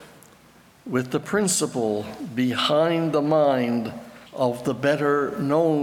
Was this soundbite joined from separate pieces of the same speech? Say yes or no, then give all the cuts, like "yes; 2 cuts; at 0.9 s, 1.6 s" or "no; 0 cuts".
yes; 1 cut; at 4.3 s